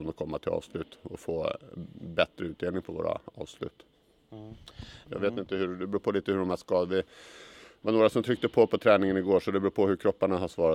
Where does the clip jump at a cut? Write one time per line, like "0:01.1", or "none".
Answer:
0:05.0

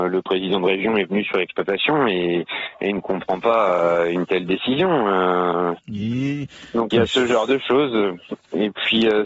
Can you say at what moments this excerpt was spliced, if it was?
0:05.8
0:06.9

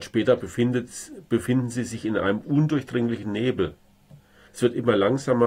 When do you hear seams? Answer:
0:04.5

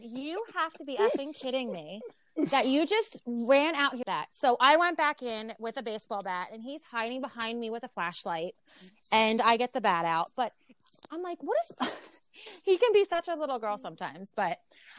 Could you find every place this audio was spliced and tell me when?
0:04.0

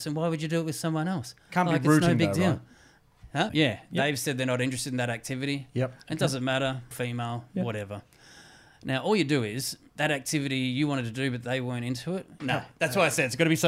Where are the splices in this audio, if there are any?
0:03.5
0:06.9
0:12.4

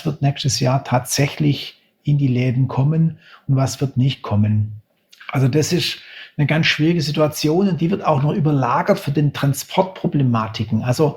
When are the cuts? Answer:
none

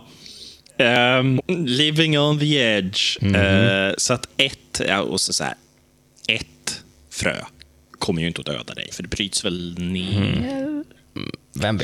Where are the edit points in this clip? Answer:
0:01.4
0:08.9

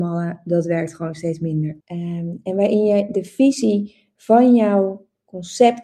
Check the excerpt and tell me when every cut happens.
0:01.8

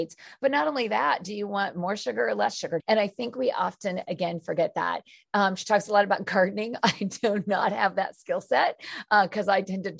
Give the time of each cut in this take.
0:02.8

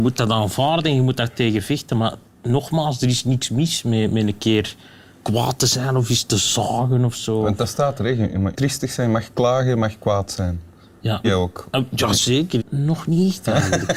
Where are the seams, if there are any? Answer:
0:08.5
0:11.2
0:12.6

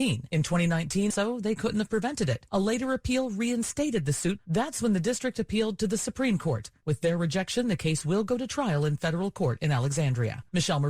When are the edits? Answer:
0:01.1

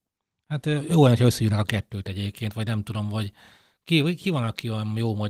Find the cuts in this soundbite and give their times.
none

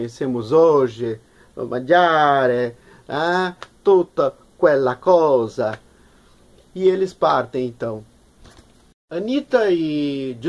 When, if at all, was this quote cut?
none

